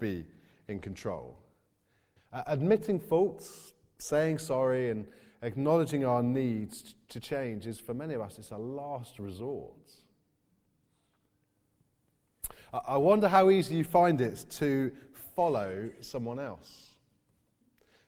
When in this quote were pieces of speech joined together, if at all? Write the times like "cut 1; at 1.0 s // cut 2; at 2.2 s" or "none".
cut 1; at 2.2 s